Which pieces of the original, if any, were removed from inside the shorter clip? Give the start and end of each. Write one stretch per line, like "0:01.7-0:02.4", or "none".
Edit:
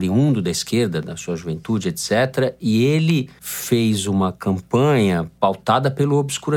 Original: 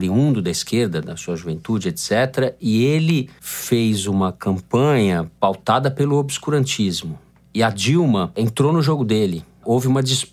none